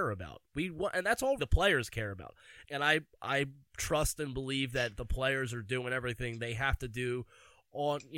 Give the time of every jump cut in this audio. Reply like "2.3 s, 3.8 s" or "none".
1.4 s, 2.6 s